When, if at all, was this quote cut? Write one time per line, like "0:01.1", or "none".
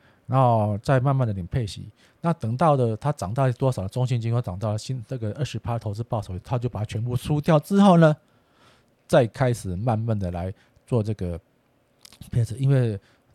none